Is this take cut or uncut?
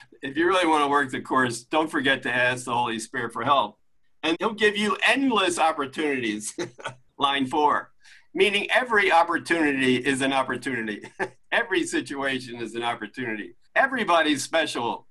cut